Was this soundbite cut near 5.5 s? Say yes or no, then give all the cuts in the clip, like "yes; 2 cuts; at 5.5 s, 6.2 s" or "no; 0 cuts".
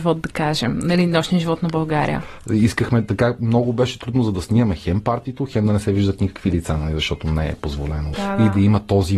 no; 2 cuts; at 2.5 s, 8.1 s